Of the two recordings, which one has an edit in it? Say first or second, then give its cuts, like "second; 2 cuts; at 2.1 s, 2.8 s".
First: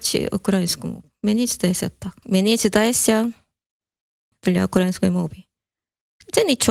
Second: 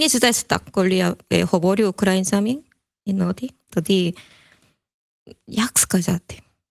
first; 2 cuts; at 2.2 s, 4.3 s